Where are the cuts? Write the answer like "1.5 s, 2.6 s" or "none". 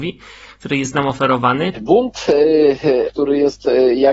1.7 s, 3.1 s